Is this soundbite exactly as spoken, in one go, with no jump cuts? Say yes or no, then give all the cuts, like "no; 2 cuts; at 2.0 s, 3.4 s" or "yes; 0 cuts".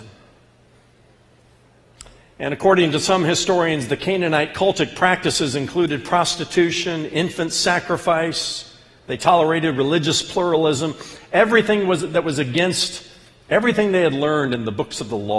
yes; 0 cuts